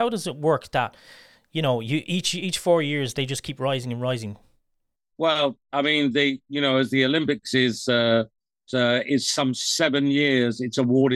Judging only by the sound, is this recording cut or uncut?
cut